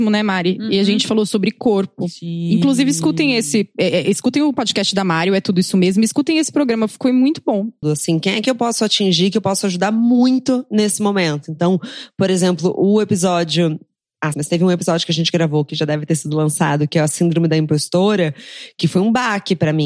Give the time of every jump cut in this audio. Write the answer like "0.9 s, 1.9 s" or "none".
7.8 s, 14.3 s